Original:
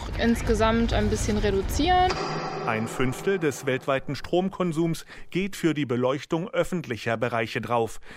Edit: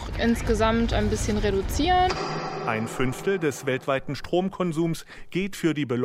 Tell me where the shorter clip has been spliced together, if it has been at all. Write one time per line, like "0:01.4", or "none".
none